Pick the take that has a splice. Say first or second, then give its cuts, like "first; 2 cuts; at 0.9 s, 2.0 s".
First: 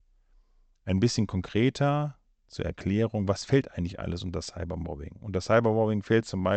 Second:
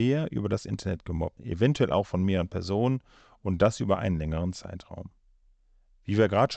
second; 1 cut; at 1.4 s